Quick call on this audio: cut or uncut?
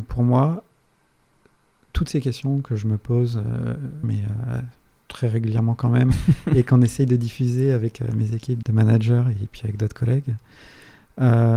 cut